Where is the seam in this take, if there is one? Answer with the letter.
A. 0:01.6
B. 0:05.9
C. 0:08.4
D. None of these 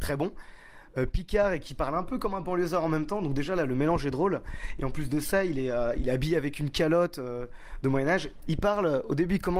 C